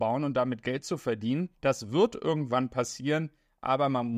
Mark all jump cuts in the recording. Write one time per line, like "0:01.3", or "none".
0:01.5